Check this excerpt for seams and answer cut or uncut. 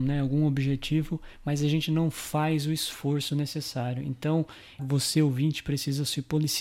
cut